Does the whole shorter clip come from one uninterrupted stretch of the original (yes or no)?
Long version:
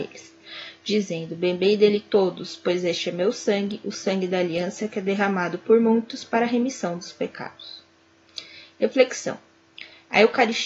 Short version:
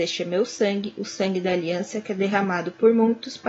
yes